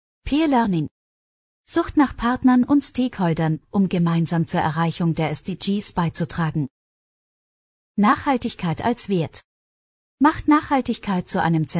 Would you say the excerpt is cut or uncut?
cut